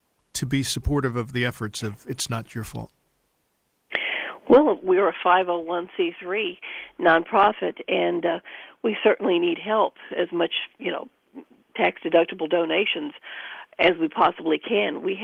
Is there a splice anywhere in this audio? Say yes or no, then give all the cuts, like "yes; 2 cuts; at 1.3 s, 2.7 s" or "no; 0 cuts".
no; 0 cuts